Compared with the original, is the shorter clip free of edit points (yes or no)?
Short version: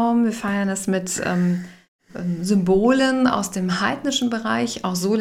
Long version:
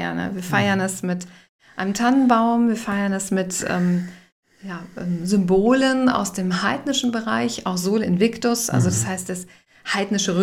no